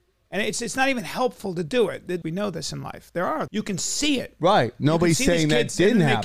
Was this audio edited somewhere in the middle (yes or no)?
yes